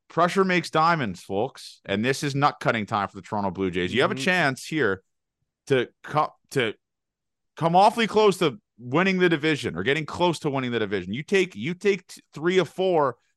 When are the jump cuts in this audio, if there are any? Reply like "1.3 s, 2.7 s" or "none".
none